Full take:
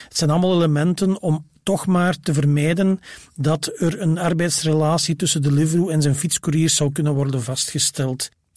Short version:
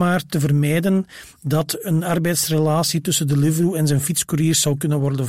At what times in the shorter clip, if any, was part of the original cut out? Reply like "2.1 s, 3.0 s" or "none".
1.8 s